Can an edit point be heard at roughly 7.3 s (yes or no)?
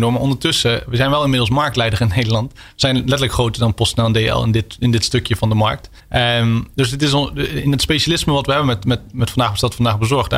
no